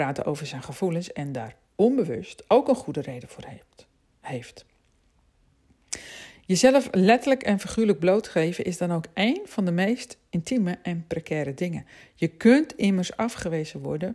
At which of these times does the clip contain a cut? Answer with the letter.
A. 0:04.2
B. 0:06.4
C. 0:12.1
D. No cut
D